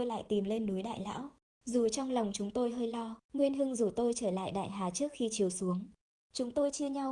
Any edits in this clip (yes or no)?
yes